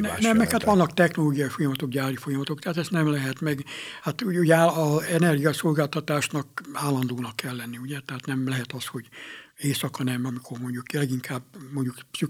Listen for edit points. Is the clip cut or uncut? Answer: uncut